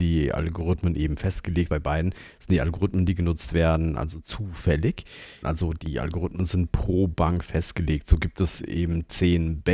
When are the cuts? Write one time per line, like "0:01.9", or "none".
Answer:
0:01.7
0:05.4